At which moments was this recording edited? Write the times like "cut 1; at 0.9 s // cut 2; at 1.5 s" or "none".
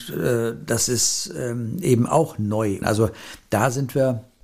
cut 1; at 2.8 s